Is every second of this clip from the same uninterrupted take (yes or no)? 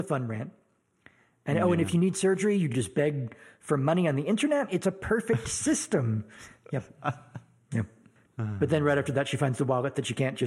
yes